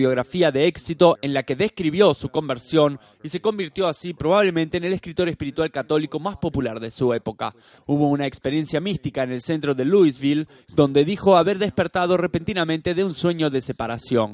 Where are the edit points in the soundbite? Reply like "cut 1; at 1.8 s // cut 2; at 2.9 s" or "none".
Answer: cut 1; at 7.8 s